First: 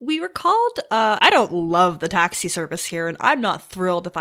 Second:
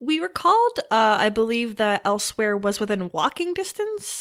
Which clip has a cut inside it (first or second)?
first